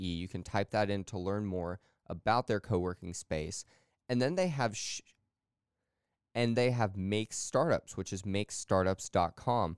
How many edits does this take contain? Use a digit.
1